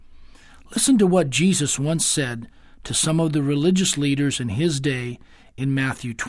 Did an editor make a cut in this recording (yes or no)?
no